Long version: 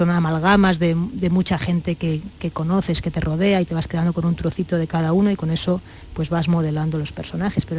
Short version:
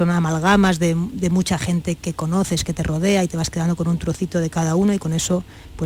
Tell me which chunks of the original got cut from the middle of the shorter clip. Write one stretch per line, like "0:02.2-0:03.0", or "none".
0:02.0-0:02.3